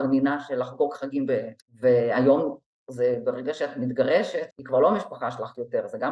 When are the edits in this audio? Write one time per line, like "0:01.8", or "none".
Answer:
0:01.6
0:04.5